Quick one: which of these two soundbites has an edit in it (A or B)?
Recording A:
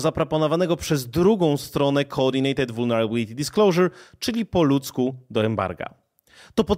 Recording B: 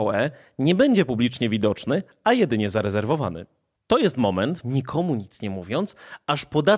B